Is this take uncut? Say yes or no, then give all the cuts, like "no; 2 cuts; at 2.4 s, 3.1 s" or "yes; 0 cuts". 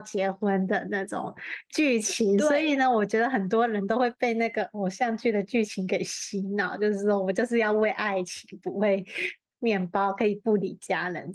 yes; 0 cuts